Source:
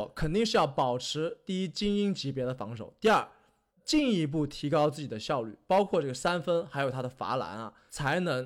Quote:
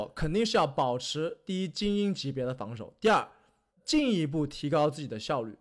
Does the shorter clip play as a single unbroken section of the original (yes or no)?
yes